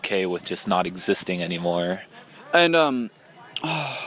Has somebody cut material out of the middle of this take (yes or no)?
yes